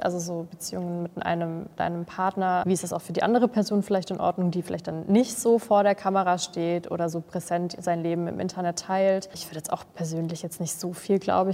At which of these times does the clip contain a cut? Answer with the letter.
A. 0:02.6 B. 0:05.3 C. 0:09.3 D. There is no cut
A